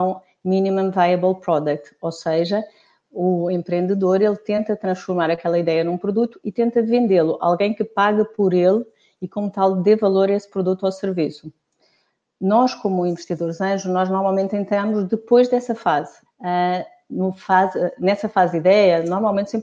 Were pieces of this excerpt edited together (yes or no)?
yes